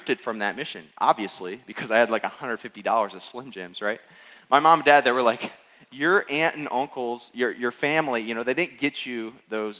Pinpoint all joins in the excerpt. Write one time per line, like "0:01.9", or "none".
none